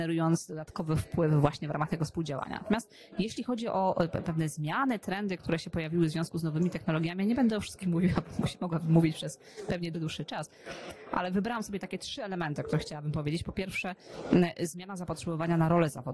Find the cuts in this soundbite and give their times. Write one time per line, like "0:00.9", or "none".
0:09.9